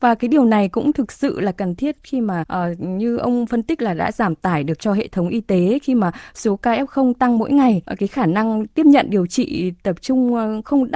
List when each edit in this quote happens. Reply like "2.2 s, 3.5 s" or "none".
2.4 s, 7.8 s